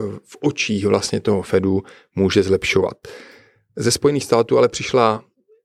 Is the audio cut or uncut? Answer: uncut